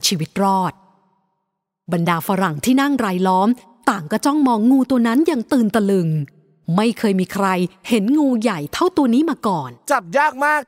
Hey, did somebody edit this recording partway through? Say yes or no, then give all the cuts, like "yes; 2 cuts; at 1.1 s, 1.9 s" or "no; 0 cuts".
no; 0 cuts